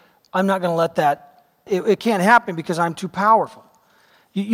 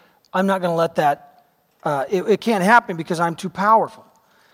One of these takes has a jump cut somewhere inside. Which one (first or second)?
first